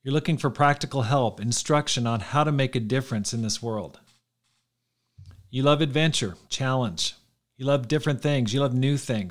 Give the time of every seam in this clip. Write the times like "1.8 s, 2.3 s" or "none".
6.5 s